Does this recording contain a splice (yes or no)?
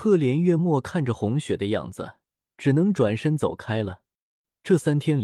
yes